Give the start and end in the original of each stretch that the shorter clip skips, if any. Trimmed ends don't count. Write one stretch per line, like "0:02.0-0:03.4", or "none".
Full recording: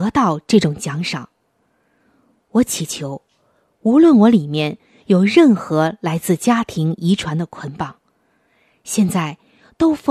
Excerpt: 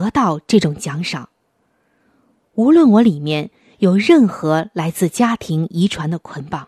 0:02.4-0:03.7

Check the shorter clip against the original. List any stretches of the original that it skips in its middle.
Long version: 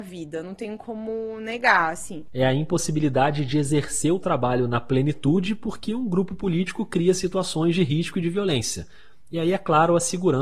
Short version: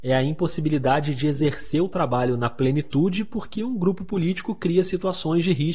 none

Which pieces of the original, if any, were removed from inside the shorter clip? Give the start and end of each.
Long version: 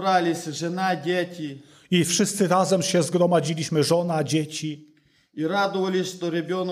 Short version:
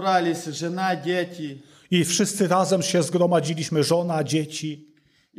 none

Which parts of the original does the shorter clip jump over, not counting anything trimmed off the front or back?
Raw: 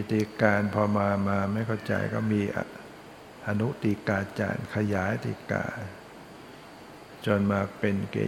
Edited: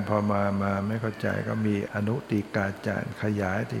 0:02.5-0:03.4

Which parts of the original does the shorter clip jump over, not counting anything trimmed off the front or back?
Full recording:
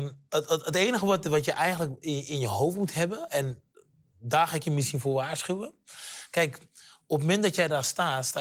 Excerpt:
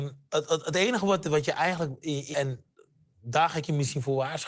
0:02.3-0:03.3

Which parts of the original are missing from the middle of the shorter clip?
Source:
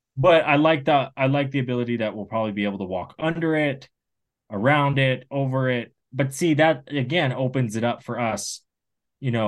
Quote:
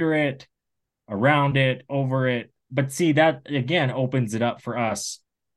none

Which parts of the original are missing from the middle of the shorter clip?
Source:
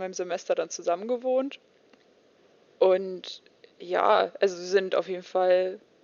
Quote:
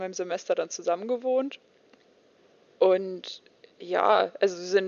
none

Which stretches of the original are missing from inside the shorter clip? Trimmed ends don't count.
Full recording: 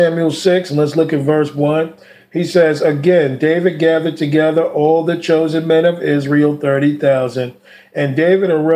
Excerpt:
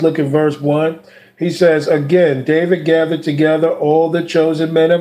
none

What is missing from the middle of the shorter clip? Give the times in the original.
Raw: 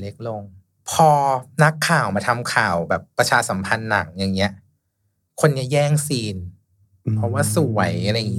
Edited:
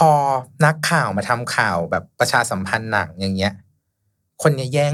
none

